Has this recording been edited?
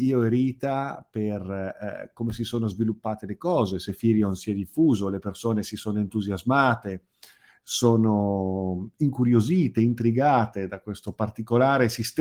no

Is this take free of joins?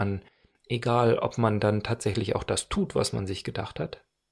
yes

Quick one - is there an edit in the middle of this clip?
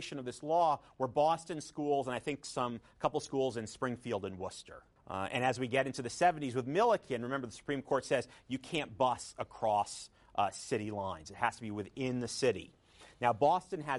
yes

